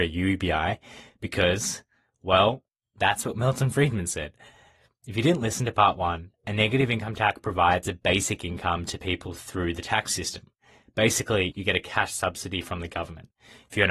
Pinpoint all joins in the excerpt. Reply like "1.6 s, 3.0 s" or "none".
11.5 s